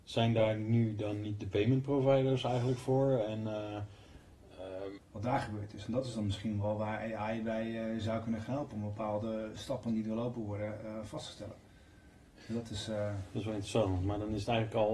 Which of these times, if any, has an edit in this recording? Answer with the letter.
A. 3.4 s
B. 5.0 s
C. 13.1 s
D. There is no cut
B